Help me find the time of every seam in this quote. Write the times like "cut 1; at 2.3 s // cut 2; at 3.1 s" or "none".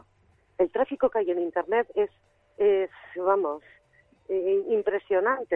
none